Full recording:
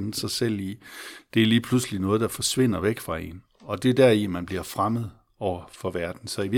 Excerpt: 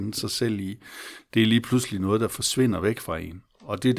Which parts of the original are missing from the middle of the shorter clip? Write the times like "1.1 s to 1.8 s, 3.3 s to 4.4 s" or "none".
none

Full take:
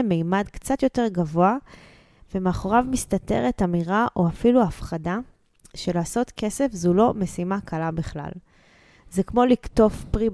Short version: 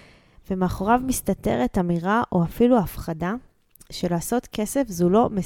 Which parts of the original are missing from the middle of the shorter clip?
none

